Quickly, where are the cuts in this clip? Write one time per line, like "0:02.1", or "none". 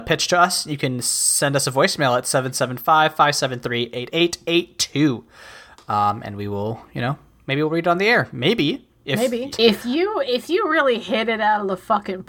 0:09.5